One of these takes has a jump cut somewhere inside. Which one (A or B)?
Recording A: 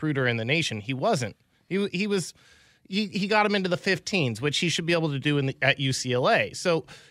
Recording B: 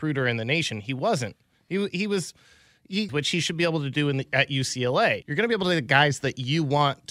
B